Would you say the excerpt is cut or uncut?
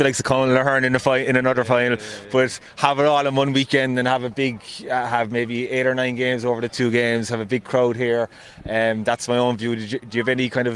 uncut